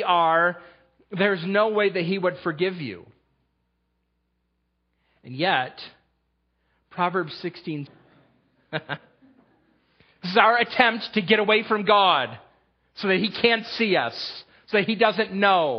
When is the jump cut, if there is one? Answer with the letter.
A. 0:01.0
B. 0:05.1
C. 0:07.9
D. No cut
C